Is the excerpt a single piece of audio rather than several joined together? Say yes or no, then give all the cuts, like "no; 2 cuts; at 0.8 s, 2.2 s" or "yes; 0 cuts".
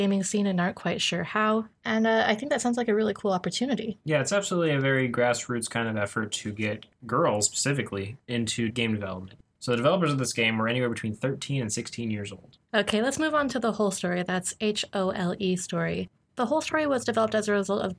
no; 2 cuts; at 9.6 s, 12.6 s